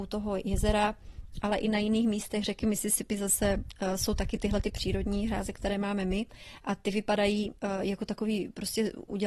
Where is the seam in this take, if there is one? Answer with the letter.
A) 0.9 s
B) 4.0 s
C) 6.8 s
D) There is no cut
D